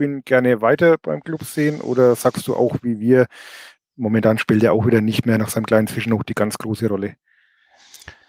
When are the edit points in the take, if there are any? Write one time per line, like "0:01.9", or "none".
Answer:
0:03.8